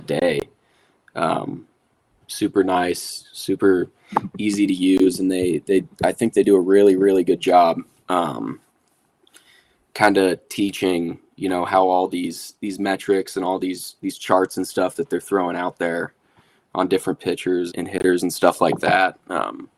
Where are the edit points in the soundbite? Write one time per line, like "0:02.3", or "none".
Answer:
0:02.2
0:17.7